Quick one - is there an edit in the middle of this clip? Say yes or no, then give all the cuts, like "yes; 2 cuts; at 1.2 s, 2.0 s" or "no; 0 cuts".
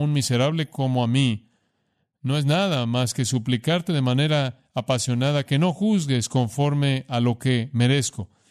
no; 0 cuts